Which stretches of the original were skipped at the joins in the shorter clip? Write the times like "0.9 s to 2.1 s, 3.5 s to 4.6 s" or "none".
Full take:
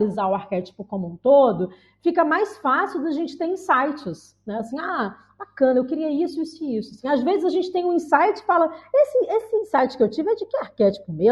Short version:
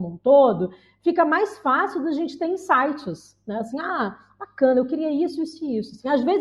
none